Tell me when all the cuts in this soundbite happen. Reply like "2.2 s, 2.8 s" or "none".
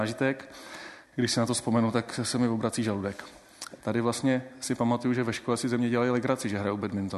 1.0 s, 3.8 s